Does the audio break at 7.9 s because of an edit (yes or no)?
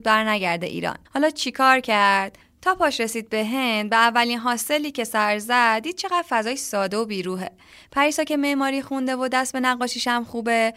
no